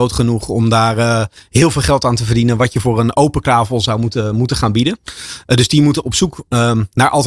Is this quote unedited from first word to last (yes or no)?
yes